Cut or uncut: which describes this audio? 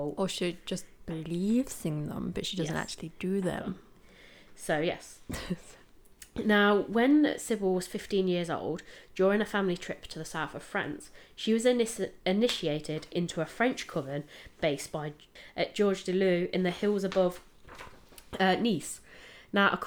uncut